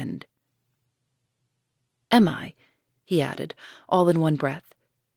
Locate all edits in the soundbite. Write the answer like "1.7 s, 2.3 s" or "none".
3.0 s